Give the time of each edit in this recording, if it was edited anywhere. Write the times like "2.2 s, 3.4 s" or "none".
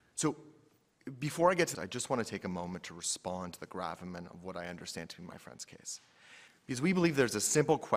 1.7 s